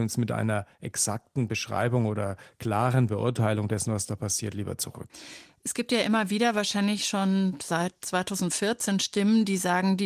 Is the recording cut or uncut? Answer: uncut